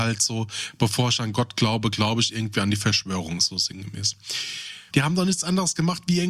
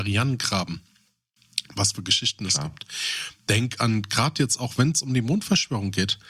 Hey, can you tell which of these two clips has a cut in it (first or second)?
first